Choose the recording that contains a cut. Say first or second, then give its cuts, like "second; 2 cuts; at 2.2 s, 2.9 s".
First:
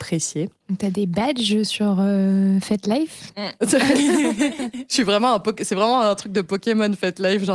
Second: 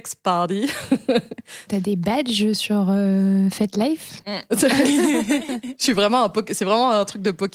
second; 1 cut; at 1.7 s